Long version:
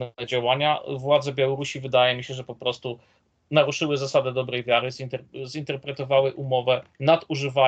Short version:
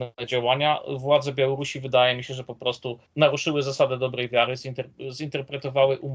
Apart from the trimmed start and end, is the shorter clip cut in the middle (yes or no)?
yes